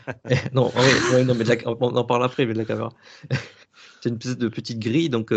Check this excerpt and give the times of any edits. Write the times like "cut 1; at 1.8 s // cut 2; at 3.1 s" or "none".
none